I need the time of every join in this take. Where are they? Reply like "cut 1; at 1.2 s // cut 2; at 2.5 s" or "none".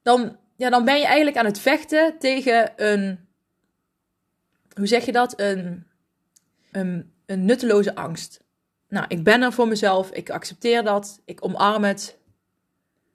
cut 1; at 6.7 s // cut 2; at 8.8 s